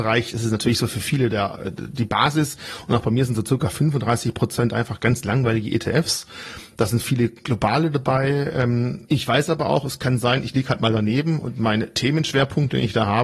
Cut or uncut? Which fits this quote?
cut